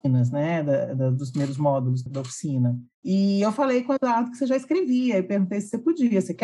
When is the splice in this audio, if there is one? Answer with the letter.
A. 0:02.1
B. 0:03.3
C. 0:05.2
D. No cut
A